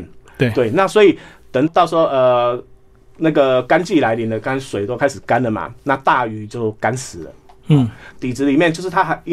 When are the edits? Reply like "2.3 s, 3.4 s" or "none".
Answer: 1.7 s, 8.1 s